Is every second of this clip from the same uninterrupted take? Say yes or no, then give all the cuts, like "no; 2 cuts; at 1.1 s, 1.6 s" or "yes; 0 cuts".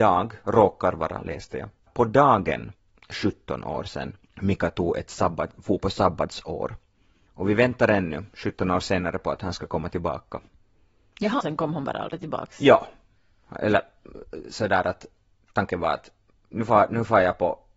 no; 2 cuts; at 1.9 s, 11.4 s